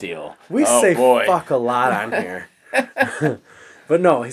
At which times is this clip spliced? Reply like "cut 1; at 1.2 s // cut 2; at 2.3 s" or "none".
none